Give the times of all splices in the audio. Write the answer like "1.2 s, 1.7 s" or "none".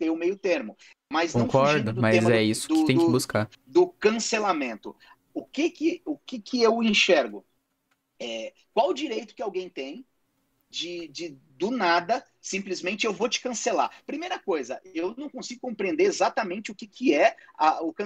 none